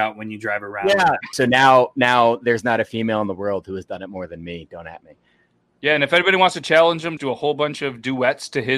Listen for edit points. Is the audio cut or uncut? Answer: cut